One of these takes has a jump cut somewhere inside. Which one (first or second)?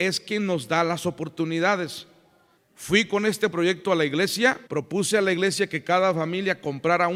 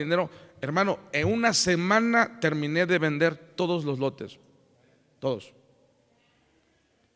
first